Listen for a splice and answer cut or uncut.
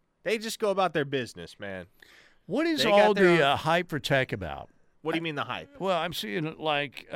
uncut